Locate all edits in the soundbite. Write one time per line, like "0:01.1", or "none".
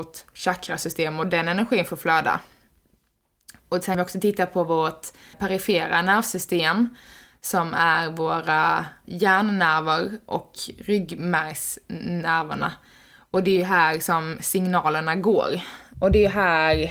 0:05.3
0:15.9